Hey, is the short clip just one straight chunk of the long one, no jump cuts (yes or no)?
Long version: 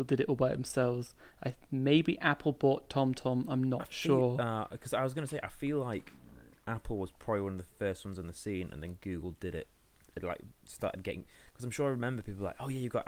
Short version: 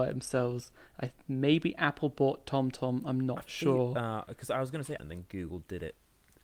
no